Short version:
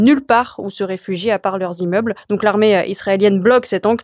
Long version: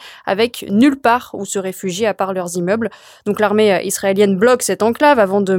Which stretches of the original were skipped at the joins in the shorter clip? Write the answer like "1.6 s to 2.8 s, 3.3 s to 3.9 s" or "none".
3.0 s to 3.2 s